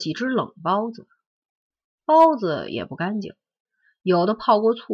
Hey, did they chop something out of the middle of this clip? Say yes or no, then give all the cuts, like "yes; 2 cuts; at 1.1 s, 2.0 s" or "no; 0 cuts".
no; 0 cuts